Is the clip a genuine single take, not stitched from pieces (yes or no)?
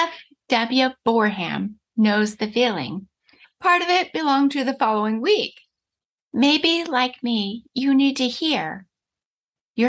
no